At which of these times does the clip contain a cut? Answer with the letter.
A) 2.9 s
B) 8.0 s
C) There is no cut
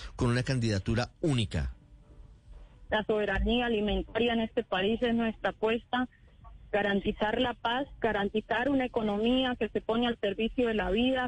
A